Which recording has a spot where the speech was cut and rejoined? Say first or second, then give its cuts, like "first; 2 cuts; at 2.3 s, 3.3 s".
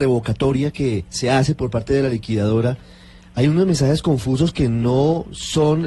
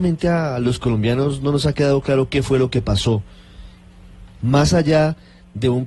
second; 1 cut; at 4.4 s